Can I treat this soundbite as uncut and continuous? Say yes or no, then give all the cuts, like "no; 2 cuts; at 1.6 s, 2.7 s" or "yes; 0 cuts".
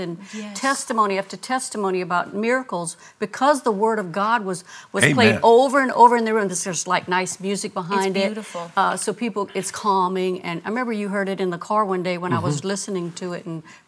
yes; 0 cuts